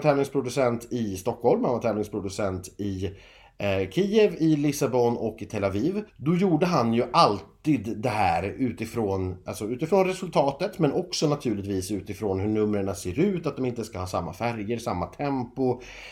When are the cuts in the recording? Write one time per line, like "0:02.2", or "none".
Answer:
0:06.1